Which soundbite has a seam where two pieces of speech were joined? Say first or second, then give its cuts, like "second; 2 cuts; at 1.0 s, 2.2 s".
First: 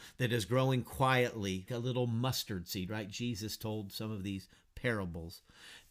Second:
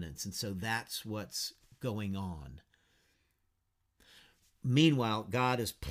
first; 1 cut; at 1.7 s